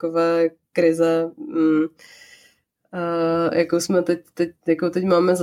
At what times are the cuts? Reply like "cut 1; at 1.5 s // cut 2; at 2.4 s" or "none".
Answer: none